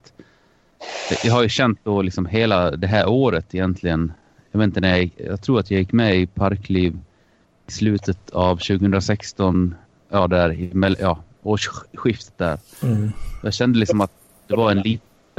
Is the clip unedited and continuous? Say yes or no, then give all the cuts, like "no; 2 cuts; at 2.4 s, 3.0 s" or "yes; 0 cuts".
yes; 0 cuts